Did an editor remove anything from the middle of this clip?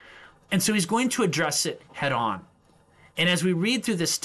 no; 0 cuts

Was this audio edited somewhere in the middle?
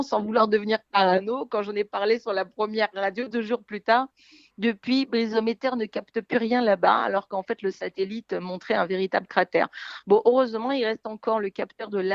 no; 0 cuts

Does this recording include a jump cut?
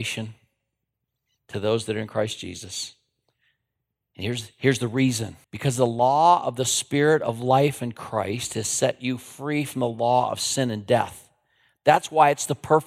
yes; 1 cut; at 5.4 s

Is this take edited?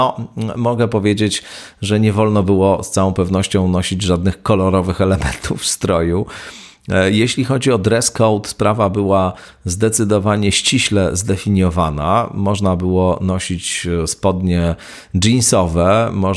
no; 0 cuts

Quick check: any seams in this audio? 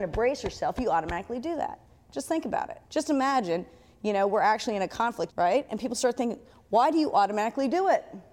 yes; 2 cuts; at 2.8 s, 5.3 s

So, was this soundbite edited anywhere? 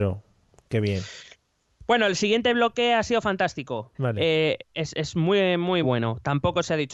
yes; 2 cuts; at 3.9 s, 5.8 s

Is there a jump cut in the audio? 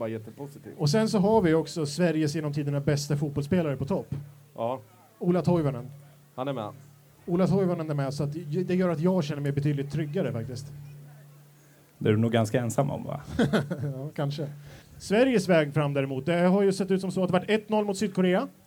yes; 1 cut; at 14.8 s

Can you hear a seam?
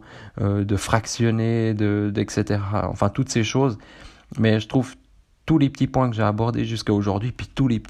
no; 0 cuts

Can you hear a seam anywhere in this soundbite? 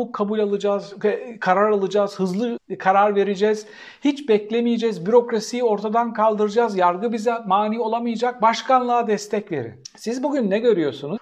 no; 0 cuts

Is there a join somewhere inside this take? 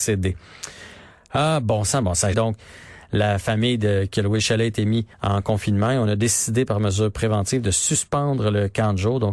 yes; 2 cuts; at 2.3 s, 5.1 s

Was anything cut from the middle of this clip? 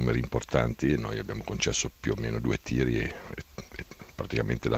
no; 0 cuts

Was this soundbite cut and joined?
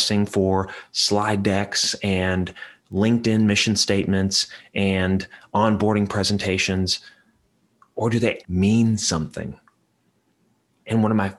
yes; 1 cut; at 8.4 s

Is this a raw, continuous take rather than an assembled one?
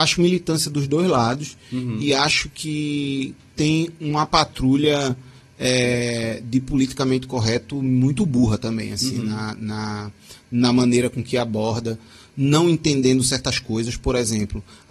yes; 0 cuts

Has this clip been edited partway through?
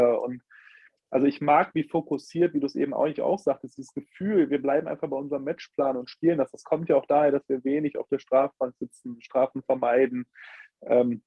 no; 0 cuts

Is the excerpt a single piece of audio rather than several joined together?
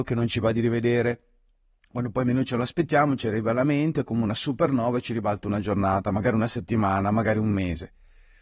yes; 0 cuts

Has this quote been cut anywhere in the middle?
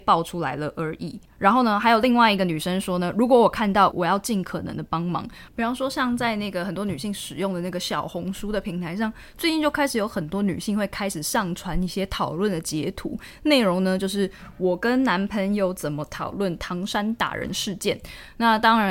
yes; 2 cuts; at 3.9 s, 5.5 s

